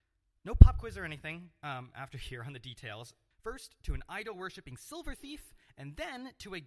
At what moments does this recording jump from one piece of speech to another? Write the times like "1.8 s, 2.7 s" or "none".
3.3 s